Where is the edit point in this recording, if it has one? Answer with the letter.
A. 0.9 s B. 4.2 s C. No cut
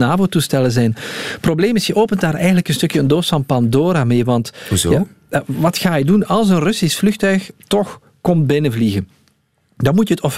C